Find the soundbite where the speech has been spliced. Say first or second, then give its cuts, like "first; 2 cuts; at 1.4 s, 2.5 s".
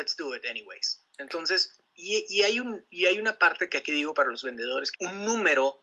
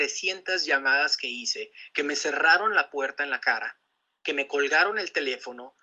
first; 1 cut; at 4.9 s